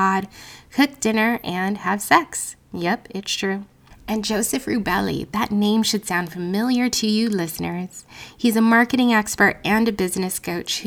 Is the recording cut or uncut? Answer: uncut